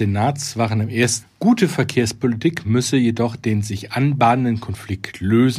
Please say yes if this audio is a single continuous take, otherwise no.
no